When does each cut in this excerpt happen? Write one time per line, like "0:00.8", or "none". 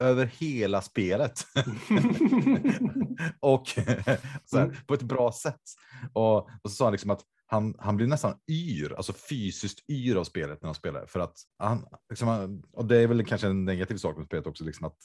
0:04.4
0:11.5